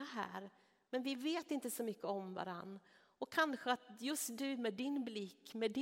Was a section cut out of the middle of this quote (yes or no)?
no